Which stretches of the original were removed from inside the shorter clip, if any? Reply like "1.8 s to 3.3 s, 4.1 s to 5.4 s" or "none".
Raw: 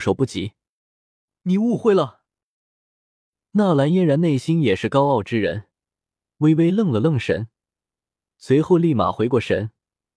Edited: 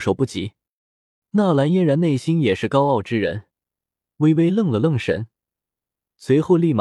1.2 s to 3.4 s